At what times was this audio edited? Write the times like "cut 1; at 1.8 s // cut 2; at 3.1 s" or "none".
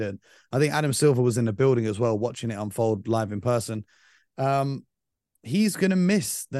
none